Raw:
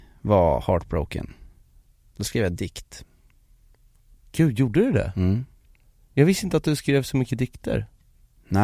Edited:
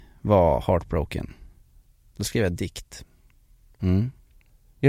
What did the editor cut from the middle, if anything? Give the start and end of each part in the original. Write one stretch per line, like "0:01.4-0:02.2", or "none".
0:03.8-0:05.1

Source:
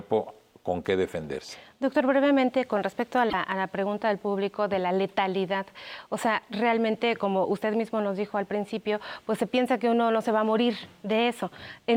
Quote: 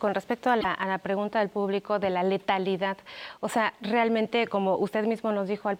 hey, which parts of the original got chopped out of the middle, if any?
none

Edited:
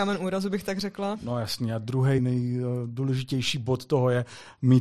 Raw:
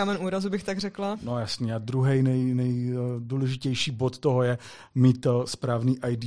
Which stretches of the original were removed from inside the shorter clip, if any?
0:02.2-0:02.5

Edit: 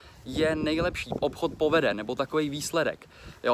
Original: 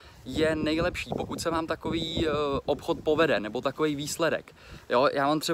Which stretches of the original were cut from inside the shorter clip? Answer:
0:01.2-0:02.6

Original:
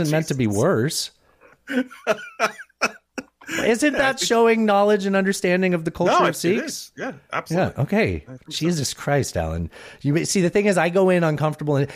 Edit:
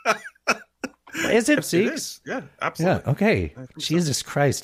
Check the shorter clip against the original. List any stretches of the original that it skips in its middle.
0:03.9-0:06.3

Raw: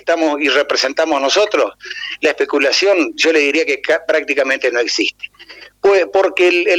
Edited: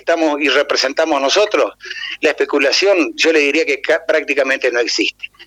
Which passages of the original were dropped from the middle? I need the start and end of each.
none

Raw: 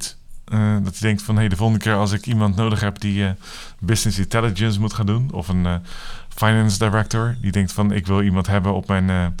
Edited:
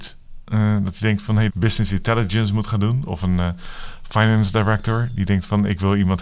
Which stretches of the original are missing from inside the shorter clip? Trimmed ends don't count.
0:01.5-0:03.8

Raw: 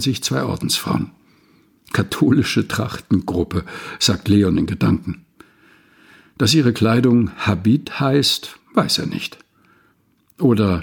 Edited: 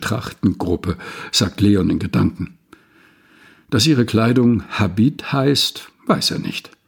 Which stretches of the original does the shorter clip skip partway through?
none

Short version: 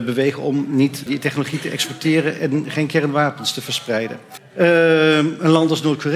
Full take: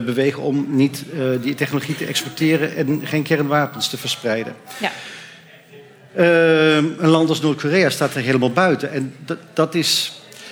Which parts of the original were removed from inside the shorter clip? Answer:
0:01.1-0:01.4
0:04.7-0:06.0

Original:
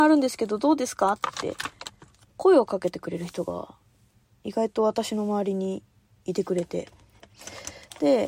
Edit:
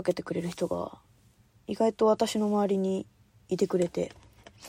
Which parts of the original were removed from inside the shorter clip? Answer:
none

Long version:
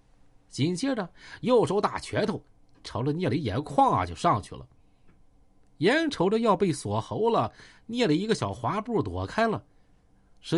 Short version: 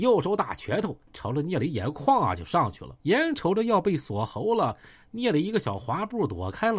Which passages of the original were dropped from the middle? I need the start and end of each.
0:02.5-0:02.8
0:04.7-0:05.8

